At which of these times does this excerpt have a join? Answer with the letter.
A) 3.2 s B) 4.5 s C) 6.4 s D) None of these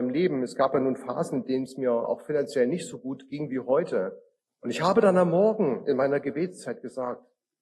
B